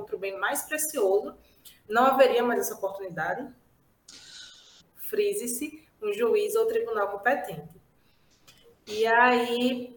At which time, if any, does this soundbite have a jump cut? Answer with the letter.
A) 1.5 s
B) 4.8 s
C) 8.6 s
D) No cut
B